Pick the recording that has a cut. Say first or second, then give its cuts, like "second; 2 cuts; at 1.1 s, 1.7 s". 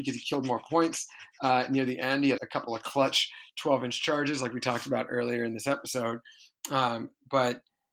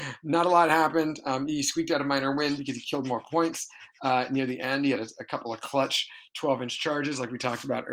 first; 1 cut; at 2.4 s